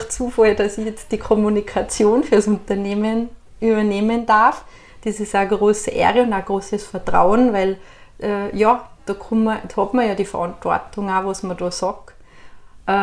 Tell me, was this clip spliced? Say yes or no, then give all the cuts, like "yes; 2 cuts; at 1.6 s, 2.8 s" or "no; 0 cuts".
no; 0 cuts